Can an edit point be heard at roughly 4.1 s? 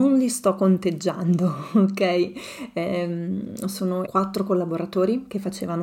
yes; 1 cut; at 4.1 s

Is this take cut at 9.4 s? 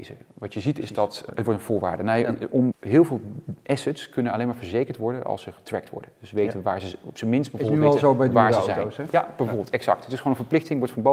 no; 2 cuts; at 1.3 s, 2.7 s

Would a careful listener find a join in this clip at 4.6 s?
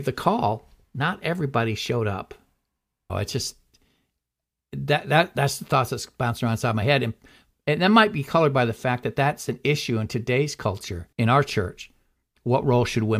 no; 2 cuts; at 3.1 s, 11.1 s

